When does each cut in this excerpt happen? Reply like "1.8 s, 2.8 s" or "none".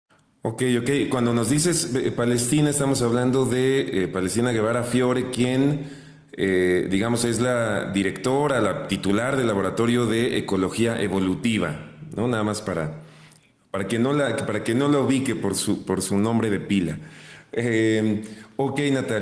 none